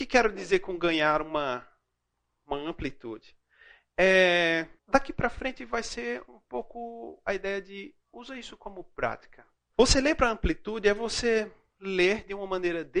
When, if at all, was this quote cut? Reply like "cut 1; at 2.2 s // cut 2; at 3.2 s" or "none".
cut 1; at 4.8 s // cut 2; at 9.7 s